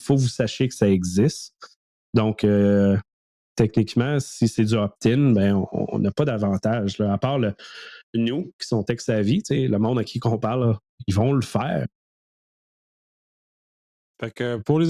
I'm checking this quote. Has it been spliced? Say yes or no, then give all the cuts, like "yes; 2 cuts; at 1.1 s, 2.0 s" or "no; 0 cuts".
no; 0 cuts